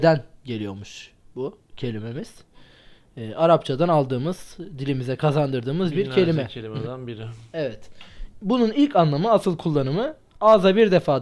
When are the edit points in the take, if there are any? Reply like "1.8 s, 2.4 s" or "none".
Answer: none